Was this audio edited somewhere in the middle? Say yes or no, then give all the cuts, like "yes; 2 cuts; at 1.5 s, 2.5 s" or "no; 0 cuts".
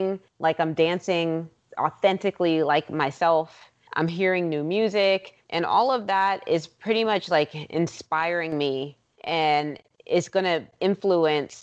no; 0 cuts